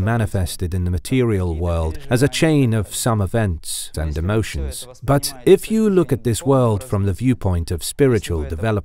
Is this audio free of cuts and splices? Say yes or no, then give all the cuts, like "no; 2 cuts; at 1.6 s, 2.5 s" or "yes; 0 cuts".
no; 1 cut; at 3.9 s